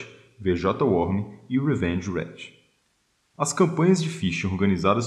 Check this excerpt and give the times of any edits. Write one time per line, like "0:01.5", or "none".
0:03.2